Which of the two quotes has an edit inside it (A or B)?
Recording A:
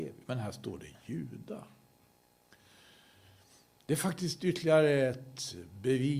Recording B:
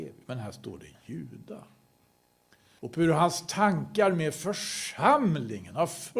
B